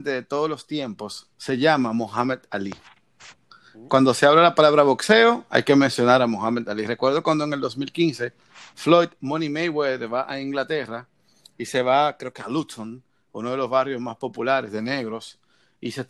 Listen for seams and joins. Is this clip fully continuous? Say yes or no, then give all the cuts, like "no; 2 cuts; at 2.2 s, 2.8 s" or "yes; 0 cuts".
no; 1 cut; at 1.3 s